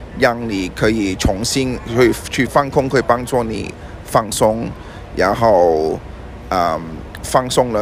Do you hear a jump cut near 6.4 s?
no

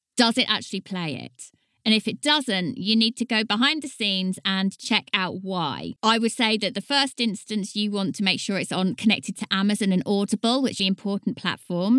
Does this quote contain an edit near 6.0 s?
yes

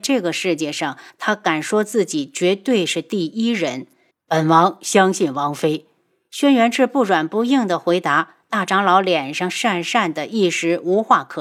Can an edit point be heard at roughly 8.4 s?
no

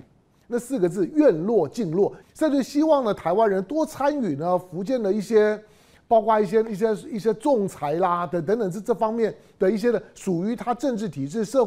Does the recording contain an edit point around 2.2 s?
yes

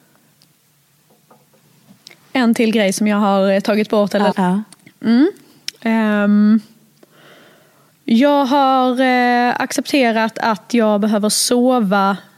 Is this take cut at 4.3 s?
yes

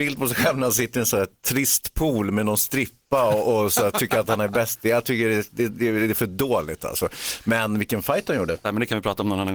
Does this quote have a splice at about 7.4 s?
no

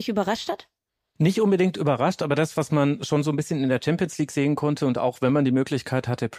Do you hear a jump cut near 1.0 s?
no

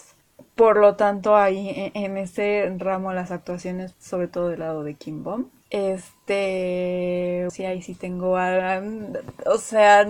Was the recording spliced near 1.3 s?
no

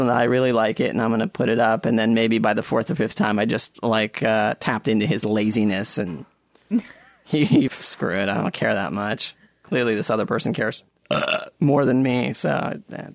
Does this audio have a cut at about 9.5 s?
no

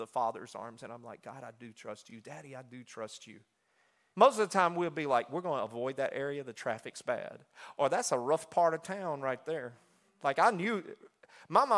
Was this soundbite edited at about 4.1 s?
yes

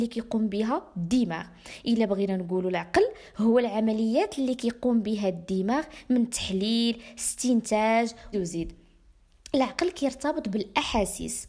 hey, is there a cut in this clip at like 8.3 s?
yes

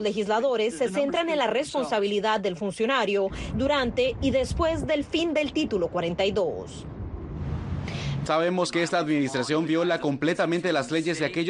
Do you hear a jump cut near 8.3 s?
yes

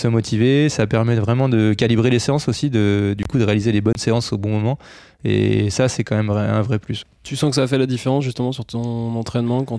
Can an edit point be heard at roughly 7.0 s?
yes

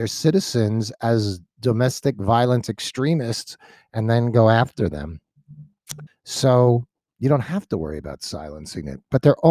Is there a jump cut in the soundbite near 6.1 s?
yes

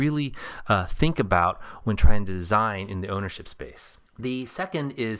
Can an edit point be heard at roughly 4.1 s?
yes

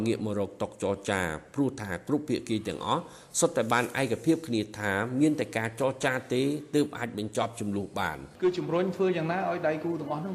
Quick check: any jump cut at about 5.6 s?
no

